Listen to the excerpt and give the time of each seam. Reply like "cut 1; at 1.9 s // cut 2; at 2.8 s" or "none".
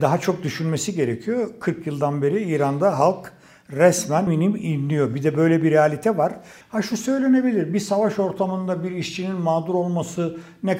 cut 1; at 4.3 s // cut 2; at 6.6 s